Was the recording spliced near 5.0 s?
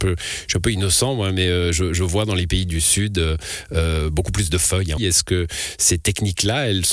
yes; 1 cut; at 5.0 s

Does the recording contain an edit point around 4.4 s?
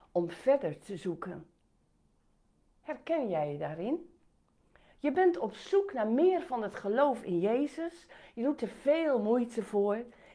no; 0 cuts

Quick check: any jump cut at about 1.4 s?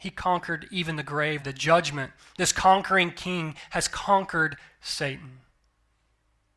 yes; 1 cut; at 1.4 s

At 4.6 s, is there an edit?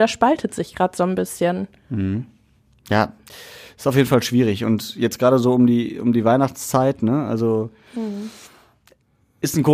no; 0 cuts

